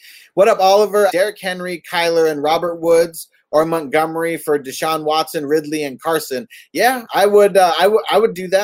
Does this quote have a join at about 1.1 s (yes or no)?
yes